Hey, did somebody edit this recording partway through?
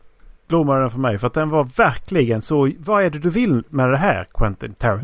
no; 0 cuts

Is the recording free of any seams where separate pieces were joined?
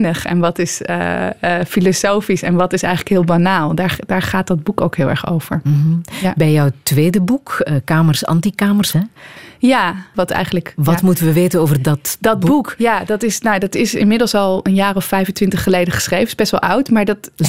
no; 2 cuts; at 8.9 s, 10.1 s

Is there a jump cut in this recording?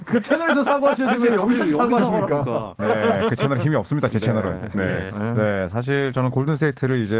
yes; 2 cuts; at 2.8 s, 5.1 s

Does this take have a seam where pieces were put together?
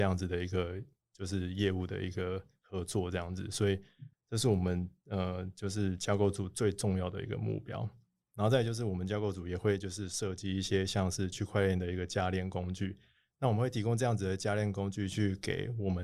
yes; 1 cut; at 4.1 s

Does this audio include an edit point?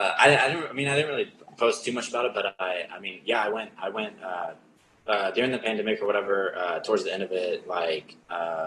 no; 0 cuts

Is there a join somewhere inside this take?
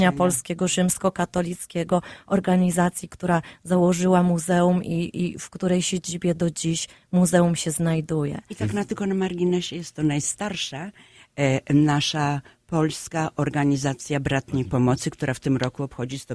no; 0 cuts

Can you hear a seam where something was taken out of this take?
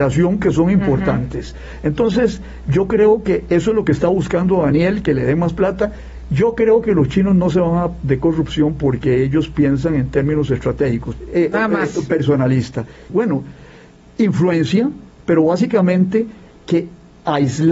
yes; 3 cuts; at 8.0 s, 11.2 s, 13.1 s

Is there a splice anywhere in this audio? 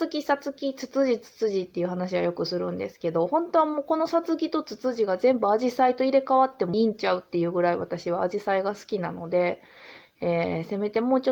yes; 1 cut; at 6.7 s

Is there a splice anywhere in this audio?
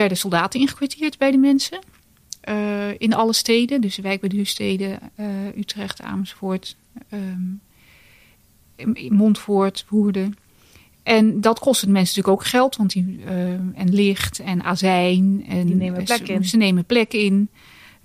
no; 0 cuts

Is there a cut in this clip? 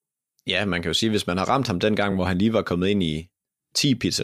no; 0 cuts

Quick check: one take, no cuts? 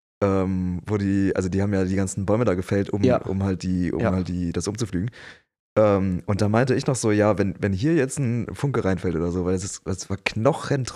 yes; 0 cuts

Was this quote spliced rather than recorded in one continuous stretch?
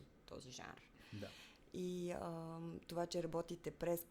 no; 0 cuts

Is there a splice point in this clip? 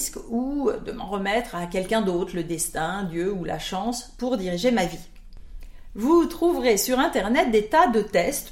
no; 0 cuts

